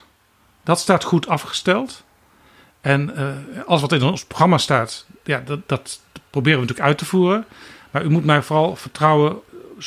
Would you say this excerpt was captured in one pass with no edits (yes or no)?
yes